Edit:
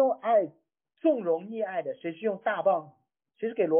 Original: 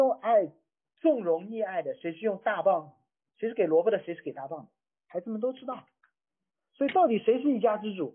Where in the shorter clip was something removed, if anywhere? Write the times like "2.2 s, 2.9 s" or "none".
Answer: none

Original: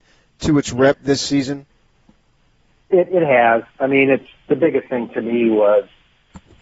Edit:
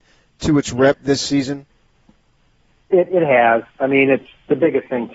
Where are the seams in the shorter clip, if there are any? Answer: none

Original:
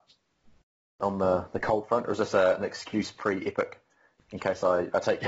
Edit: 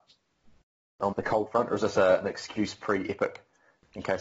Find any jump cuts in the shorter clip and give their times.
1.1 s

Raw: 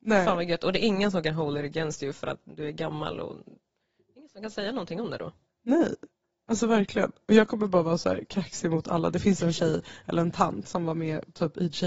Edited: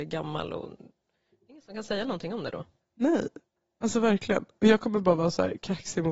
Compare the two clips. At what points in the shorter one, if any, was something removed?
none

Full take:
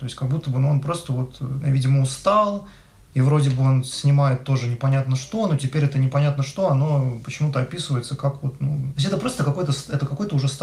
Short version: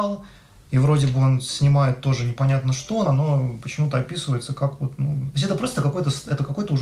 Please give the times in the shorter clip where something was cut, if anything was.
3.1 s

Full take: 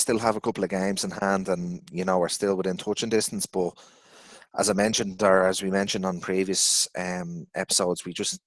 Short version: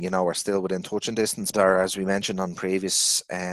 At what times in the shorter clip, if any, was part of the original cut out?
1.5 s

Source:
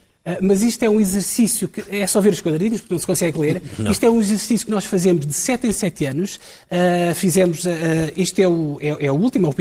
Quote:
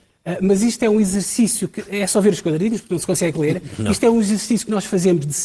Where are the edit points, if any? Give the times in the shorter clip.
none

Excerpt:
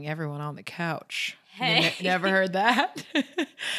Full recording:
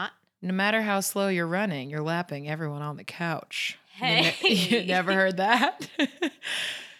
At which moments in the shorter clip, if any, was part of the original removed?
2.0 s

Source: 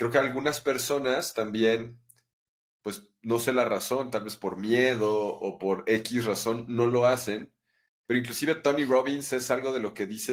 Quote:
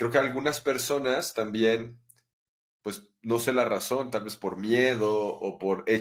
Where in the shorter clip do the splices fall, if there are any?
none

